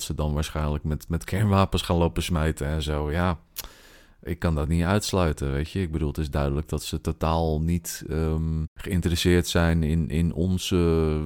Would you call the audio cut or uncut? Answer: cut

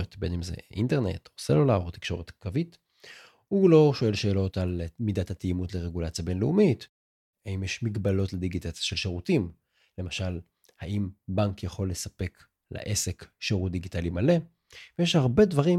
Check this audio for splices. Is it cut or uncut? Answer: uncut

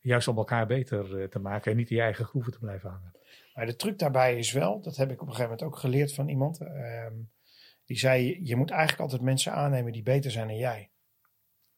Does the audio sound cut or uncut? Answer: uncut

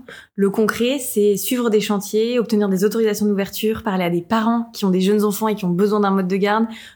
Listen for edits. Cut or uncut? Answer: uncut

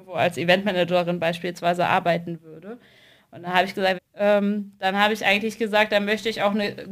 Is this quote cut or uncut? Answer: cut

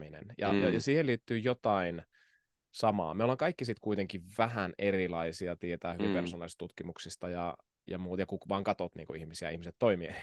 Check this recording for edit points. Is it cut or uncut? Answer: uncut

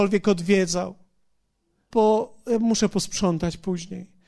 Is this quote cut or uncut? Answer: cut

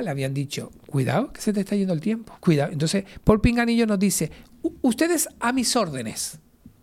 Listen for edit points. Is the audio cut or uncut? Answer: cut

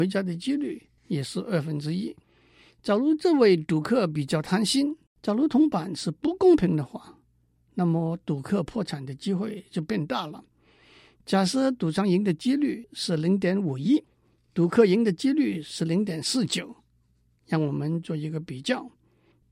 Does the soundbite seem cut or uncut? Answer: cut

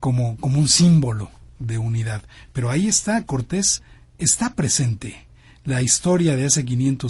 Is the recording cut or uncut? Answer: uncut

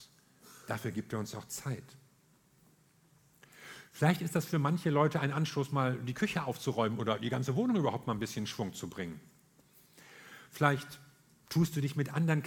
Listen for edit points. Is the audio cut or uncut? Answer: uncut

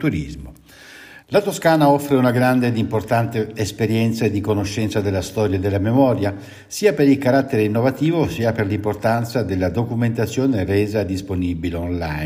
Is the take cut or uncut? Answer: cut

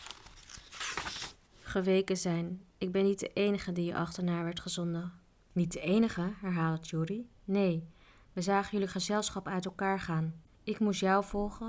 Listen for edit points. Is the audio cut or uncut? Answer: uncut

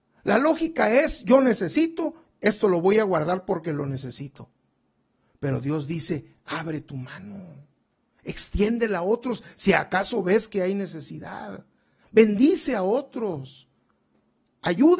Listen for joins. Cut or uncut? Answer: uncut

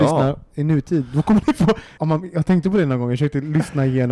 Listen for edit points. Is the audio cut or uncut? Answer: cut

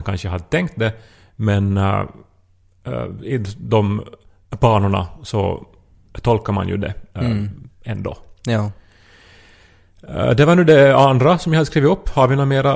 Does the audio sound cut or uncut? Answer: uncut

